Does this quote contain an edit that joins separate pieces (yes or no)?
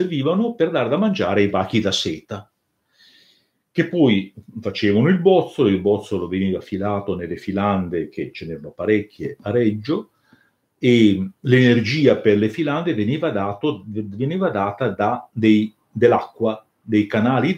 no